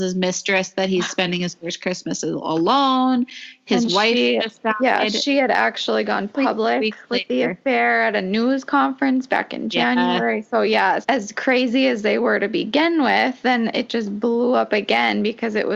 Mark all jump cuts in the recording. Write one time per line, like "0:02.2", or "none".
0:11.0